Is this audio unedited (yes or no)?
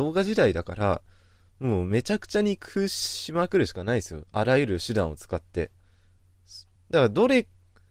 yes